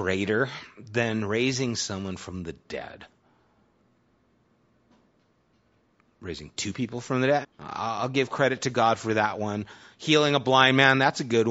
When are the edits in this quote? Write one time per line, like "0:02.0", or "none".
0:07.4